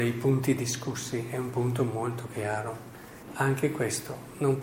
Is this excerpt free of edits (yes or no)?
no